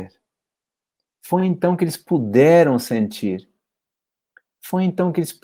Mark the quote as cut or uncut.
uncut